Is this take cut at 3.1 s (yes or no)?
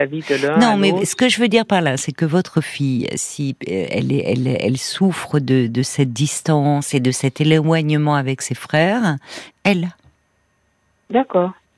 no